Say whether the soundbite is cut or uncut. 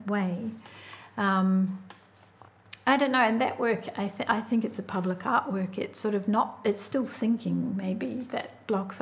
uncut